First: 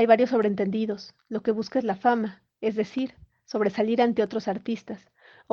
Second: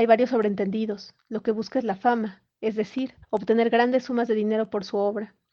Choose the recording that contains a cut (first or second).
second